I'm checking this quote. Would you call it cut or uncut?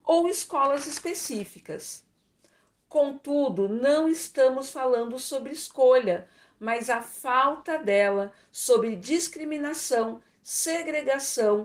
uncut